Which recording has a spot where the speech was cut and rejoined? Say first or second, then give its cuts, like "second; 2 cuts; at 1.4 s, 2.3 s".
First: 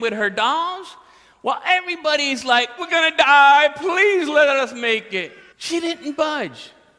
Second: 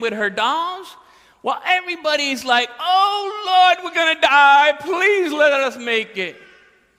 first; 2 cuts; at 2.8 s, 5.5 s